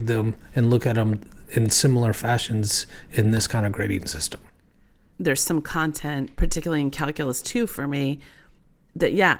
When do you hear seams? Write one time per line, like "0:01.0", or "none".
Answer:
0:05.1